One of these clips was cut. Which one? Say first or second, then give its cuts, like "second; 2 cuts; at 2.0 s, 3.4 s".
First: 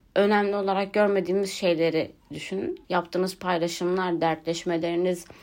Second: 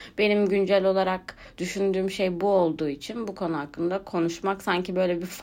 first; 1 cut; at 2.8 s